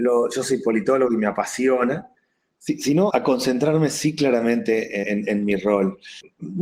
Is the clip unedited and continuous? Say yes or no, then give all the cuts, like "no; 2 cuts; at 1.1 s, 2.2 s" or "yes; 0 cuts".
no; 2 cuts; at 3.1 s, 5.0 s